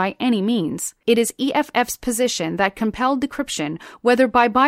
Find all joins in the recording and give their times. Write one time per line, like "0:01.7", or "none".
0:01.0